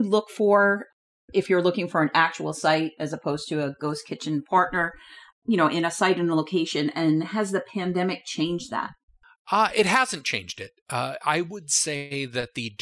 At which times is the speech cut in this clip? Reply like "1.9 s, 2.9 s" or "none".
5.3 s